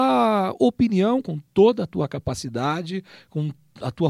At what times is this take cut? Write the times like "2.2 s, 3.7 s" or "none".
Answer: 1.2 s